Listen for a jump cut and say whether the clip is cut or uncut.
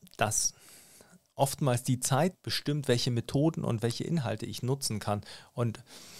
cut